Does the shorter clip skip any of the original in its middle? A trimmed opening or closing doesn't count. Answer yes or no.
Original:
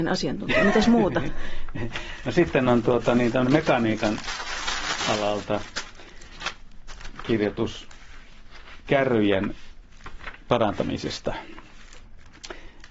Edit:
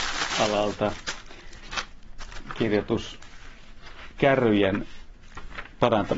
no